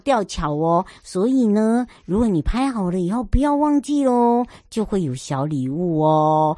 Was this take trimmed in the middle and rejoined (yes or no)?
no